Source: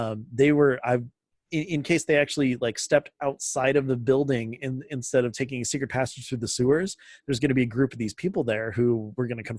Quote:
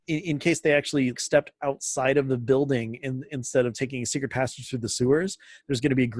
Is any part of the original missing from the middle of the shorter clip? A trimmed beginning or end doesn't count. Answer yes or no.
yes